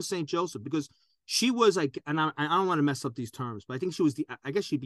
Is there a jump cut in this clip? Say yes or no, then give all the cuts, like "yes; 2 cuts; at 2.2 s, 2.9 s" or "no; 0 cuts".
no; 0 cuts